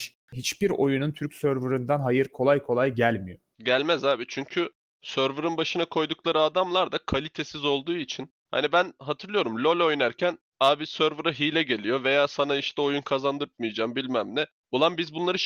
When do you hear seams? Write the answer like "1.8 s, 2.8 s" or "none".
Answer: none